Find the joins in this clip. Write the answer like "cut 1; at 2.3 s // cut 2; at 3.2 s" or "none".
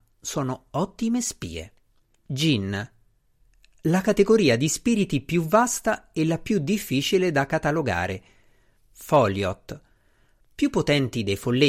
cut 1; at 2.2 s // cut 2; at 8.7 s

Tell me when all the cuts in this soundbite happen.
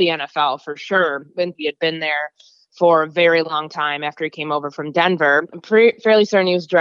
cut 1; at 1.6 s // cut 2; at 5.5 s

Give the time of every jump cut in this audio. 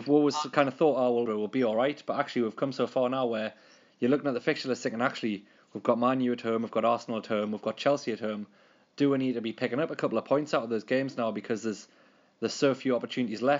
cut 1; at 1.3 s

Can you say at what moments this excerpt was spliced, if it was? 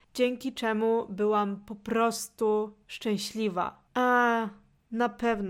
cut 1; at 3.9 s

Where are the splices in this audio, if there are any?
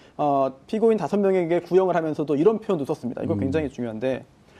none

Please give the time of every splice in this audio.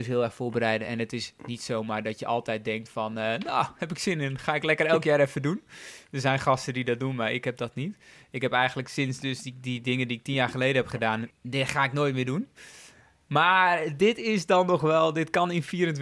cut 1; at 11.3 s

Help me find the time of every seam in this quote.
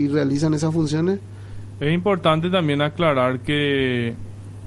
cut 1; at 1.7 s

